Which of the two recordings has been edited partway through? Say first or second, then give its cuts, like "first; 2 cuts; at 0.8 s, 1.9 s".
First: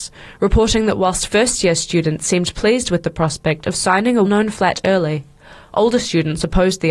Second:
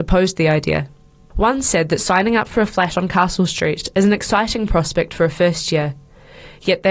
first; 1 cut; at 4.2 s